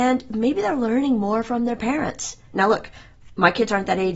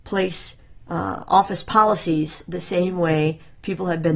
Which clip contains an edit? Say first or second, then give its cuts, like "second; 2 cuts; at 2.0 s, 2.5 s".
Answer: first; 1 cut; at 2.5 s